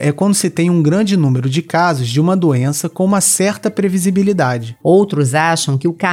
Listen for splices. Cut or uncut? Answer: cut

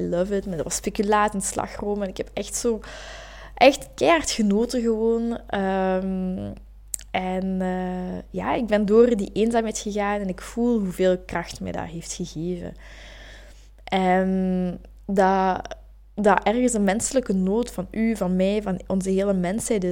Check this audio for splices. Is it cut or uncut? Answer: uncut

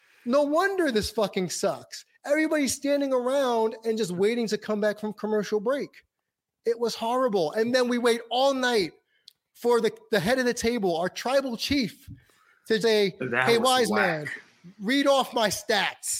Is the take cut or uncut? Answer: cut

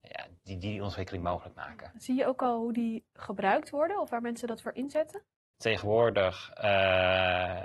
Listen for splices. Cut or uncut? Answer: cut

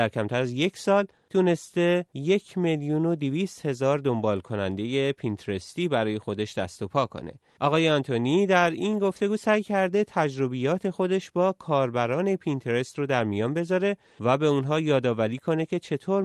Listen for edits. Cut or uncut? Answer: uncut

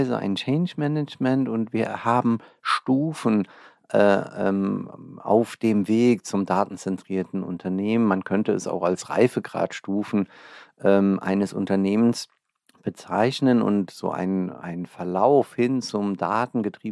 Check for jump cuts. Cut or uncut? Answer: uncut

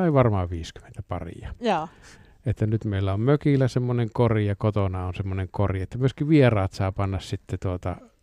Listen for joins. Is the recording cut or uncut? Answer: uncut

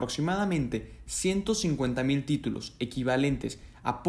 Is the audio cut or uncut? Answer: uncut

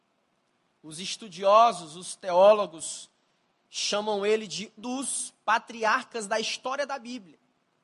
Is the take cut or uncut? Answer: cut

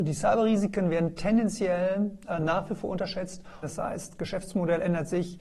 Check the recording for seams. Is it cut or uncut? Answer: cut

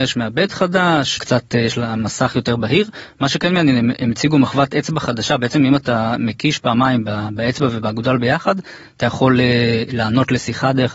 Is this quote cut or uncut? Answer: cut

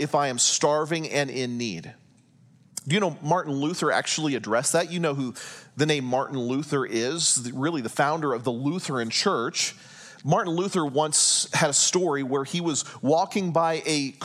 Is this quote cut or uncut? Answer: uncut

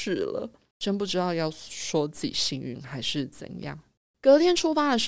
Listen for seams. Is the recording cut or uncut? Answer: cut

